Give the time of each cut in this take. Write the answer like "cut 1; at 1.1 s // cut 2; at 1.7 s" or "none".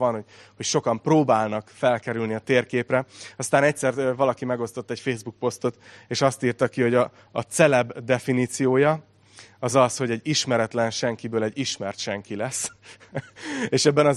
none